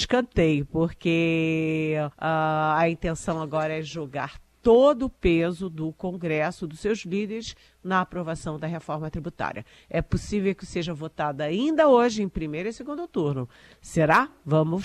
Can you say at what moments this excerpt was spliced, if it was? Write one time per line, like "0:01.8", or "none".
0:02.1